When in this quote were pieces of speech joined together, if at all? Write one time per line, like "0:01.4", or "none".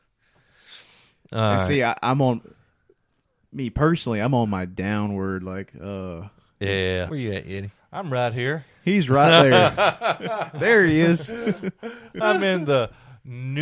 0:07.1